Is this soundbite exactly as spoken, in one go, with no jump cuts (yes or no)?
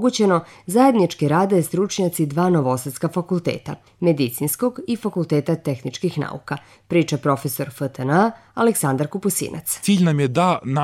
yes